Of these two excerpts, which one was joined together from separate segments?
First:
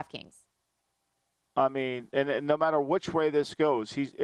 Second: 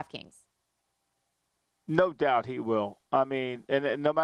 first; 1 cut; at 1.5 s

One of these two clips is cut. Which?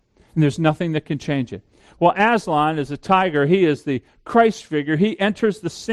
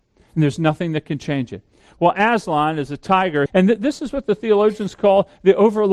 second; 1 cut; at 3.5 s

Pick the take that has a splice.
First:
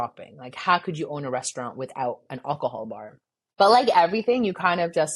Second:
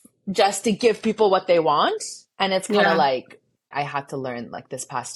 second; 1 cut; at 3.7 s

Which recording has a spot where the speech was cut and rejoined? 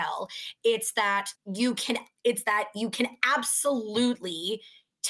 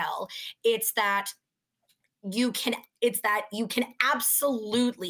first; 1 cut; at 1.4 s

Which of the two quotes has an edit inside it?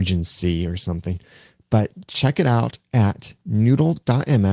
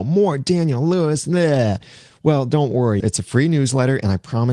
second; 1 cut; at 3.0 s

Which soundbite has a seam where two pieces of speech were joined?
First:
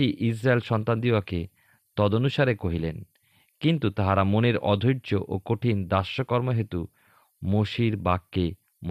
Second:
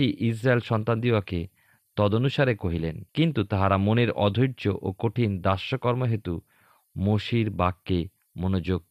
second; 1 cut; at 3.1 s

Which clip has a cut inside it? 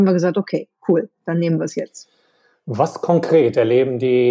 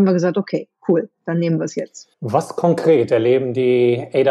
second; 1 cut; at 2.1 s

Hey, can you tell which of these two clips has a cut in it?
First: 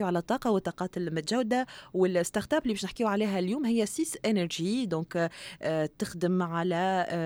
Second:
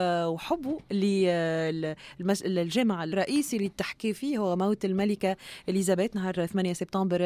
second; 1 cut; at 3.1 s

